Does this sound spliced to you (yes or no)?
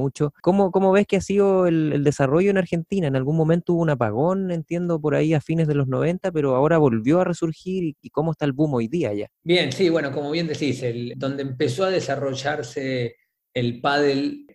yes